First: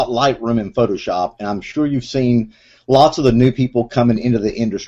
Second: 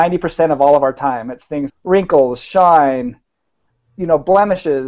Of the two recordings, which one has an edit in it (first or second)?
second